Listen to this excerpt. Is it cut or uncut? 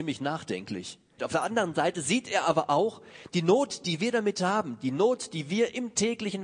cut